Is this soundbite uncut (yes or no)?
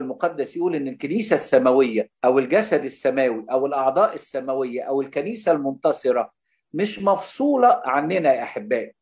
no